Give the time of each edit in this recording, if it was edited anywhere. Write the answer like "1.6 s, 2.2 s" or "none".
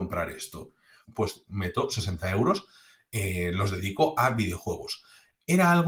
1.0 s